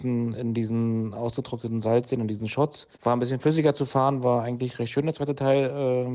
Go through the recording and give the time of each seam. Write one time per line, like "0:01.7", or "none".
0:02.9